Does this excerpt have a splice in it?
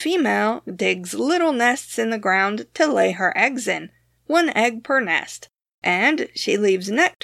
no; 0 cuts

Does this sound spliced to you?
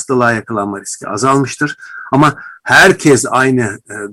no; 0 cuts

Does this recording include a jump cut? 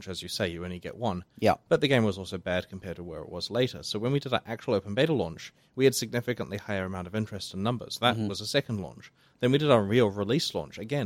no; 0 cuts

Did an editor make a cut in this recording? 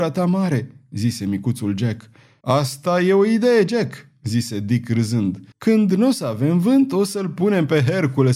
yes; 2 cuts; at 2.4 s, 5.5 s

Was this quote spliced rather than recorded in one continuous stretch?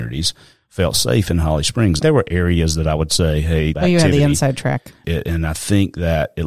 yes; 3 cuts; at 2.0 s, 3.7 s, 5.0 s

